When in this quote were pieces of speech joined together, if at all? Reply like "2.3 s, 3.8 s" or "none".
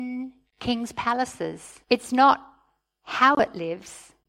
1.8 s